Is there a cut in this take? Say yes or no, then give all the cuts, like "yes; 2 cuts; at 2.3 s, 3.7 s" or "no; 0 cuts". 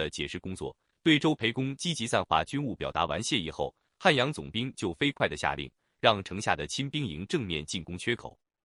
no; 0 cuts